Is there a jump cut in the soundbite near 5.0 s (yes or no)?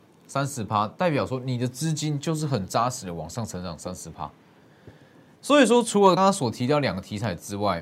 no